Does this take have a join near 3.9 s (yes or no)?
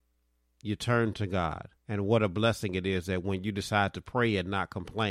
no